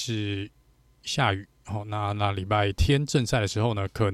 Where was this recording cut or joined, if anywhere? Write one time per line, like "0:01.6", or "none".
none